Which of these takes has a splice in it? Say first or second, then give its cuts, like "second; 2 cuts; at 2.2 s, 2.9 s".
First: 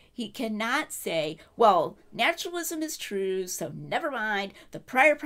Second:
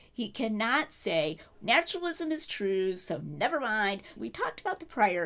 second; 2 cuts; at 1.5 s, 4.2 s